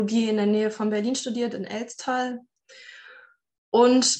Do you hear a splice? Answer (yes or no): no